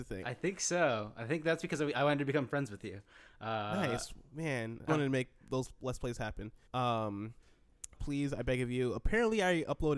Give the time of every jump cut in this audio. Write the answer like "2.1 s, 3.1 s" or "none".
4.9 s, 6.7 s, 8.0 s